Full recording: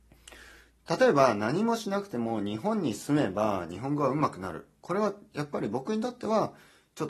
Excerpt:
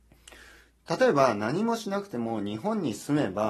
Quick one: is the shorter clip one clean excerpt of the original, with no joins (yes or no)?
yes